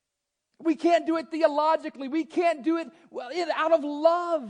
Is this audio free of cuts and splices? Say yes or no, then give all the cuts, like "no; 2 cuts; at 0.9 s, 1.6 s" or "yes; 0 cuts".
yes; 0 cuts